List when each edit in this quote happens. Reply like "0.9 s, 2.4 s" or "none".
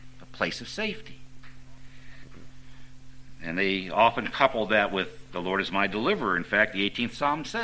none